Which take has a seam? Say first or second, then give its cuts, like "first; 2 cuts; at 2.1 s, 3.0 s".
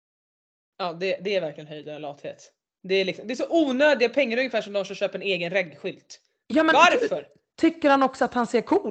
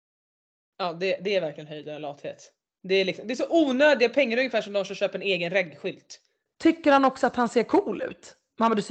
second; 1 cut; at 6.5 s